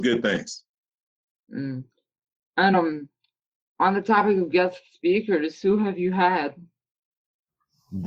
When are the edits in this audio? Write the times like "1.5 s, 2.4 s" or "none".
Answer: none

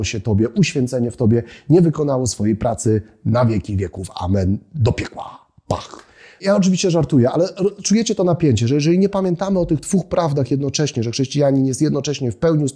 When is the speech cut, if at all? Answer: none

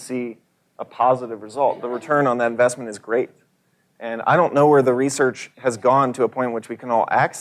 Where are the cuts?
none

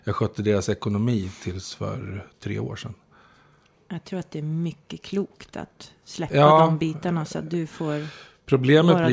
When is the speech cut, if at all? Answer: none

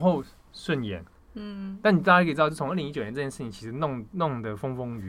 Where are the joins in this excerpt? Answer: none

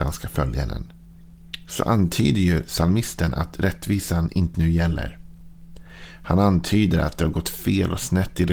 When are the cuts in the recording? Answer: 4.5 s

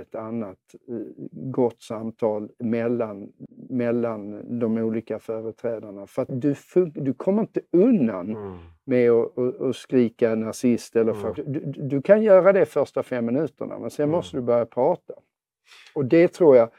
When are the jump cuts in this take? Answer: 6.3 s, 11.4 s

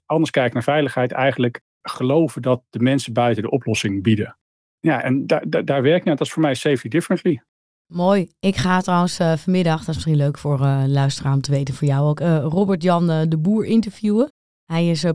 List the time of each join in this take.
none

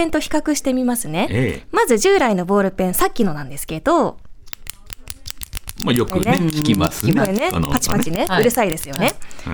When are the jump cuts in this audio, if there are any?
none

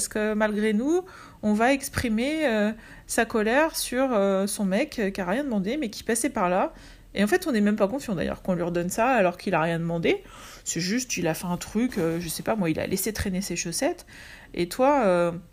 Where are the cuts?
none

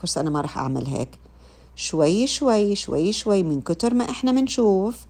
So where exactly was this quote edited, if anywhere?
none

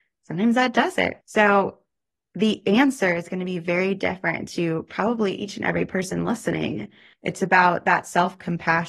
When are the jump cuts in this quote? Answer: 7.1 s

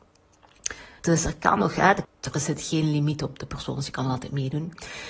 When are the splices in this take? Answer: 1.0 s, 2.0 s

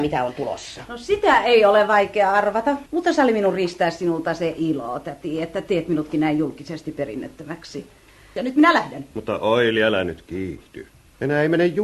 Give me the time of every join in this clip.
2.9 s, 8.4 s

